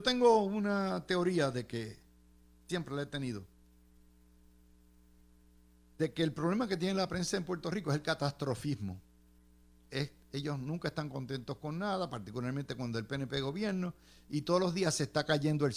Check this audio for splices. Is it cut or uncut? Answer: uncut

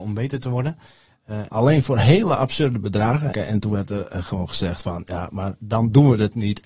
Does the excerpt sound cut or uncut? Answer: cut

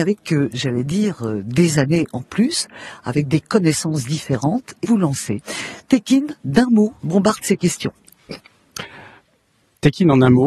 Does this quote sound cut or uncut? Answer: cut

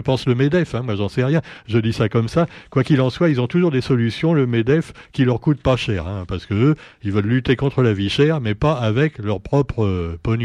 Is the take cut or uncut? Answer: uncut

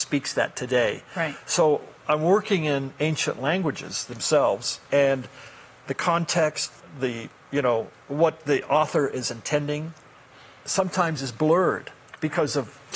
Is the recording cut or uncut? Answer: cut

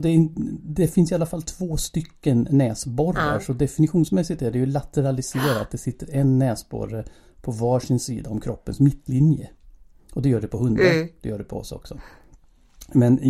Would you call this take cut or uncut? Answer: uncut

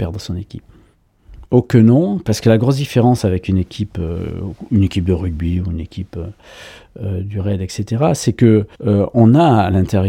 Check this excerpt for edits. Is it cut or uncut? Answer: cut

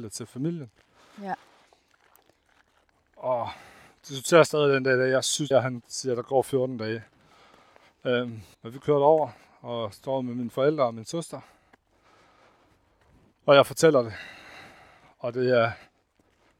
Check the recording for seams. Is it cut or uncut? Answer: cut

